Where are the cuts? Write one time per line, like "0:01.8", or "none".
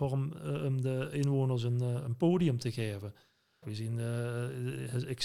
0:03.6